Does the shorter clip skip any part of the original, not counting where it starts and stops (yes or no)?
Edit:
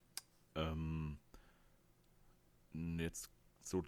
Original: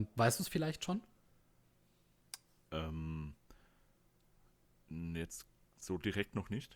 no